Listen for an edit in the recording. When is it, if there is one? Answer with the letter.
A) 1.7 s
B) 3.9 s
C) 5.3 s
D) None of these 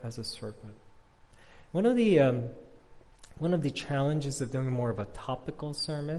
A